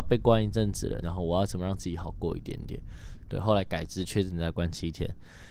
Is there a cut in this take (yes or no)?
yes